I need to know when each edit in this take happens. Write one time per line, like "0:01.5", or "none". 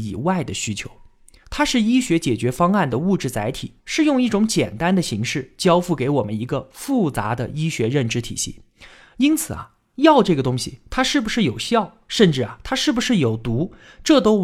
0:01.4